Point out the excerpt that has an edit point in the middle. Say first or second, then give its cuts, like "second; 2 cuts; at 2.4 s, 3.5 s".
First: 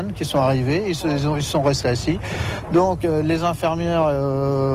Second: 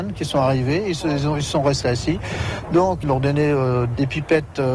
second; 1 cut; at 3.0 s